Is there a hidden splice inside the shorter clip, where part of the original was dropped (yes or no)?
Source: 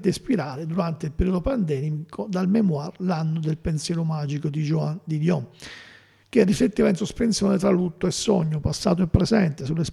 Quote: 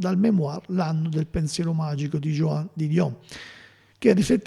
no